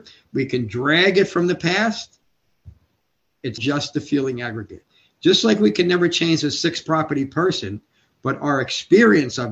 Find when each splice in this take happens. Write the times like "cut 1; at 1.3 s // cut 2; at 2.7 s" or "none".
cut 1; at 3.6 s // cut 2; at 8.1 s